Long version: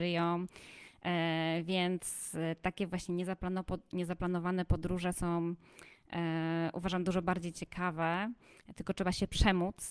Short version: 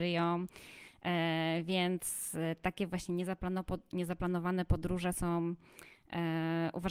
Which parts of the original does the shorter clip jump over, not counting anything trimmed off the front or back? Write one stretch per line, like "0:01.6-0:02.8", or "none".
none